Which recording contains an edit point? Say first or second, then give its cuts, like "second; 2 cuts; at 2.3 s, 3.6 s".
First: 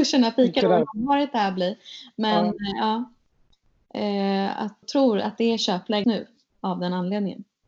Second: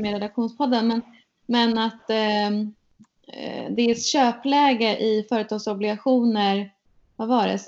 first; 2 cuts; at 4.8 s, 6.0 s